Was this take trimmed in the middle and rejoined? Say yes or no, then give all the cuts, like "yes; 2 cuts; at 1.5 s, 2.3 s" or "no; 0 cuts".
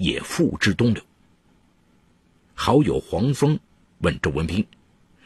yes; 1 cut; at 2.4 s